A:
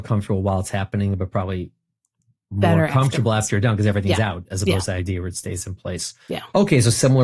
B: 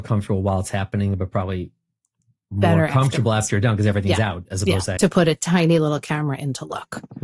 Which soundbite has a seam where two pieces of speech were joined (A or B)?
B